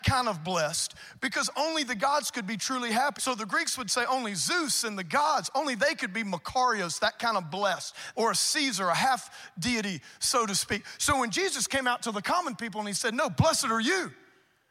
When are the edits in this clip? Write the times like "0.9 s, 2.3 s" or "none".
3.2 s, 8.1 s